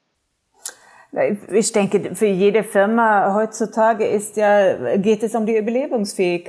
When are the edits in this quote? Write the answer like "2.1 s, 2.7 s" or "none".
none